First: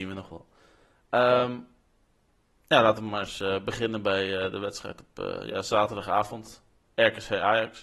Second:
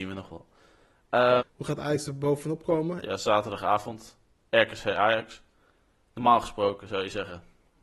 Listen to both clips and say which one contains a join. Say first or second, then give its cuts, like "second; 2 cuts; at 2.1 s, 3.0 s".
second; 2 cuts; at 1.4 s, 3.0 s